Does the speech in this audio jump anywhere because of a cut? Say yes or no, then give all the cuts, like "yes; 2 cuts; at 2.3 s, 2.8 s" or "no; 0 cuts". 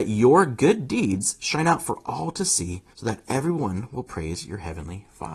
yes; 1 cut; at 2.9 s